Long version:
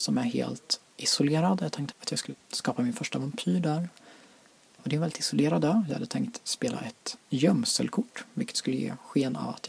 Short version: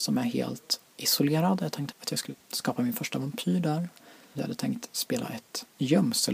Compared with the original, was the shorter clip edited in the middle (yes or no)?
yes